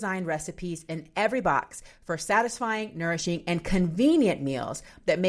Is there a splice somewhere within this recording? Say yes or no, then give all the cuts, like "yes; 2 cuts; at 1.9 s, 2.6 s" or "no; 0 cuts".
no; 0 cuts